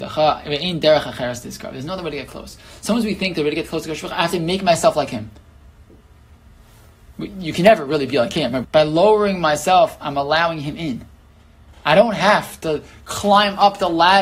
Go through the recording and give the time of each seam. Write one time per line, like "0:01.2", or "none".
0:08.6